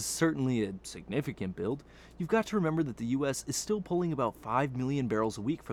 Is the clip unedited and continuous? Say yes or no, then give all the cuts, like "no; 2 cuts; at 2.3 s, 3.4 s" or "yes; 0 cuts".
yes; 0 cuts